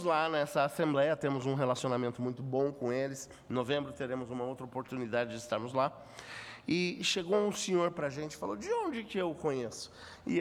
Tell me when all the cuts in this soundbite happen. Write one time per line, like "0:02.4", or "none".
none